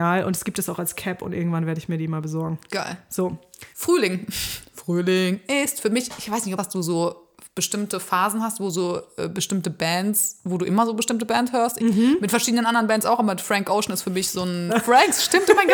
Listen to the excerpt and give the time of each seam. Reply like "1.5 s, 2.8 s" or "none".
6.6 s, 11.8 s, 14.7 s